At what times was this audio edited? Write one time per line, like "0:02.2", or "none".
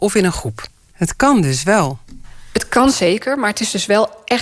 0:00.9